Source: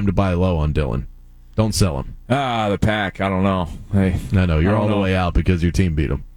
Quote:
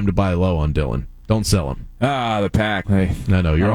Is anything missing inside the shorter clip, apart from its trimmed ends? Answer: yes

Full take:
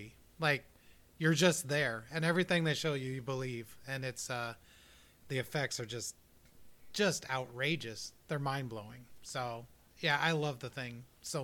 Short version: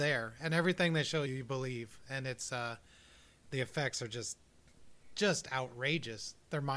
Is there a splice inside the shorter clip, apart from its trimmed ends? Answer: yes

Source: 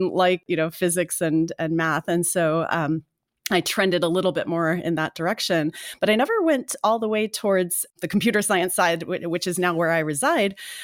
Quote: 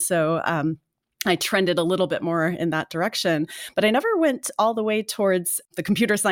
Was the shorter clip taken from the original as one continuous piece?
yes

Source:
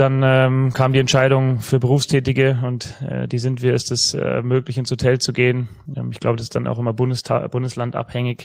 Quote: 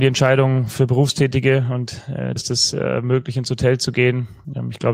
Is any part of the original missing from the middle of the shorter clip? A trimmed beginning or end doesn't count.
yes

